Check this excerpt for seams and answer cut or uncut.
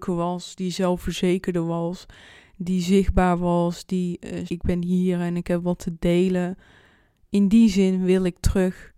cut